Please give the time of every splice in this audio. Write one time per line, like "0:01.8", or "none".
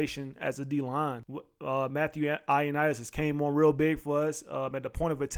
none